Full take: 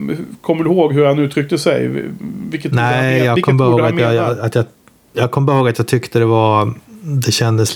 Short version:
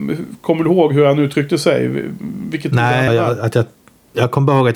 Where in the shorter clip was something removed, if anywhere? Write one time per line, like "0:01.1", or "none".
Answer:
0:03.1